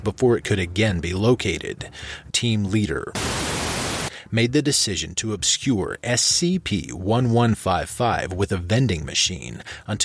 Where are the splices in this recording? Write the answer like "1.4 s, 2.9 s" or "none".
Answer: 2.3 s